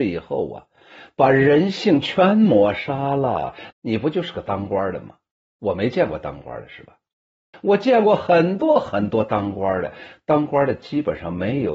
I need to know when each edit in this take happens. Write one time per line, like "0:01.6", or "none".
0:03.7
0:07.5